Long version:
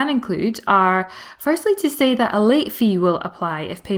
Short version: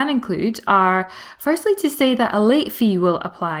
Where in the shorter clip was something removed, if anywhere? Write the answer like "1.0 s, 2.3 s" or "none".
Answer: none